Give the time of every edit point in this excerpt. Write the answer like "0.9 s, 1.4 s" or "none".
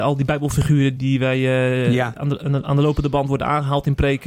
1.0 s